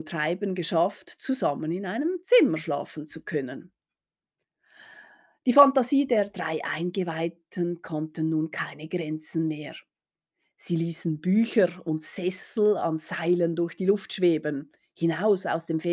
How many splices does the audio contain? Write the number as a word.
zero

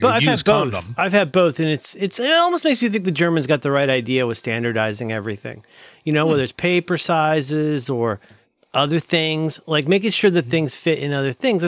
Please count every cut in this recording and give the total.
zero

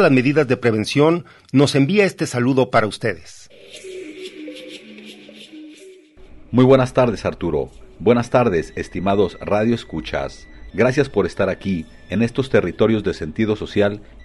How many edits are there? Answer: one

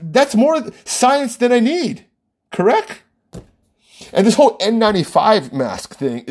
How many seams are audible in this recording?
zero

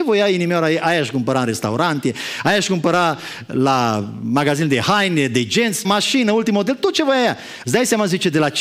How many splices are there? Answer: two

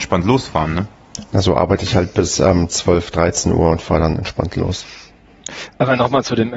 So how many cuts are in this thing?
zero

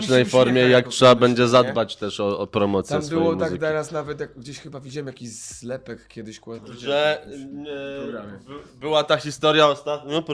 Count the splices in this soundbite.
one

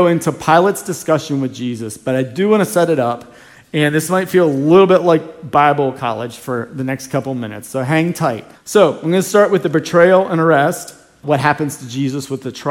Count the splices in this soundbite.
two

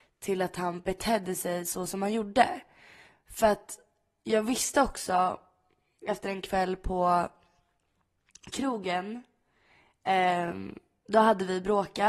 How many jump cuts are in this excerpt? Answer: zero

